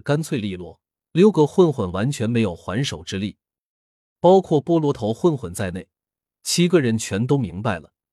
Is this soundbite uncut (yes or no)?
no